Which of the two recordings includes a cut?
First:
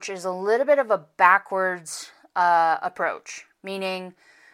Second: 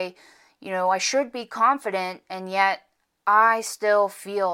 first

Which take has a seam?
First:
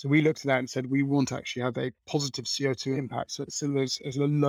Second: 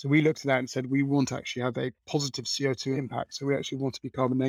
first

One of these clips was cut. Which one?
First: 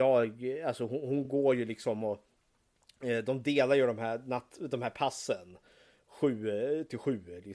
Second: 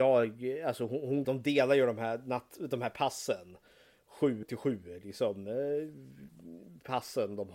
second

